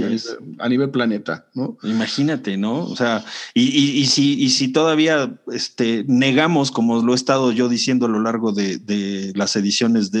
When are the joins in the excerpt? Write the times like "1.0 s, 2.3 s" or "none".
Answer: none